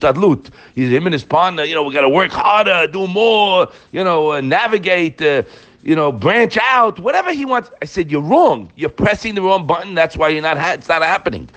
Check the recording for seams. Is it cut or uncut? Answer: uncut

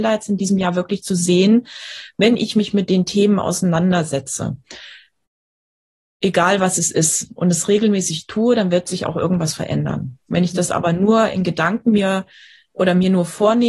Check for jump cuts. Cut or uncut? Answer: uncut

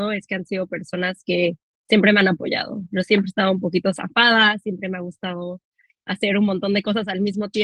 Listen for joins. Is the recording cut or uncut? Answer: uncut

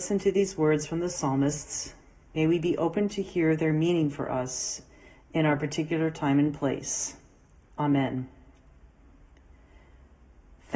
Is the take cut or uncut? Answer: uncut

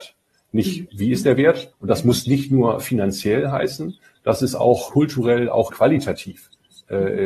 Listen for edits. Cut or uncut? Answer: cut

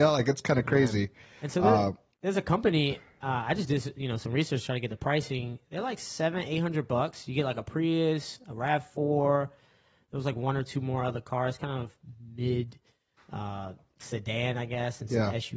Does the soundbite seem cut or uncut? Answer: uncut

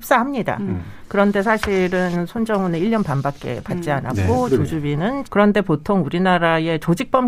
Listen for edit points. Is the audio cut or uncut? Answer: cut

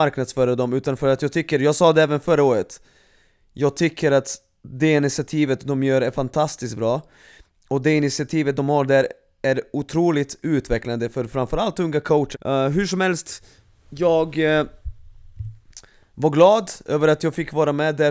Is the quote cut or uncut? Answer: cut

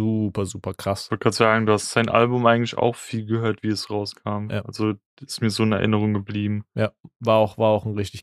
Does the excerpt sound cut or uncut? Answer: uncut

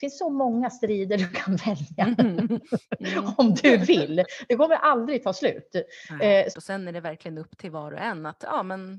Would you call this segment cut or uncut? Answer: cut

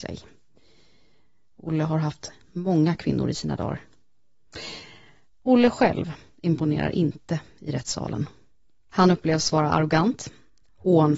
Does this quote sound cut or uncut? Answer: uncut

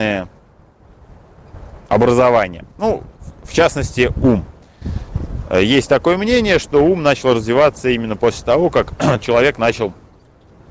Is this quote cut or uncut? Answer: uncut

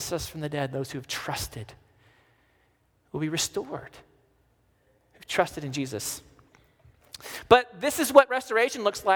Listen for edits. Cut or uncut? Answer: uncut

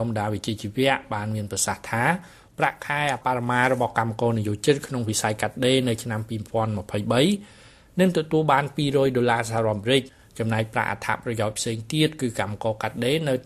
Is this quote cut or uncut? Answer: cut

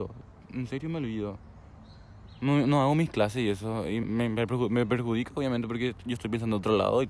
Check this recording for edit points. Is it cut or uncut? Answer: cut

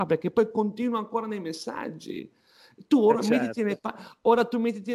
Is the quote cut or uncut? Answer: uncut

